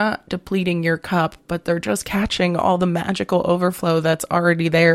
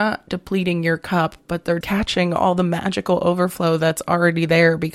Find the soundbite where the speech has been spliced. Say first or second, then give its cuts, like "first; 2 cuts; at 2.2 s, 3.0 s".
second; 1 cut; at 1.8 s